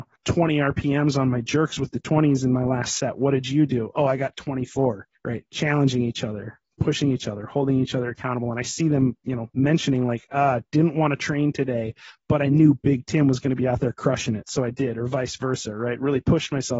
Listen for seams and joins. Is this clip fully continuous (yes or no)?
yes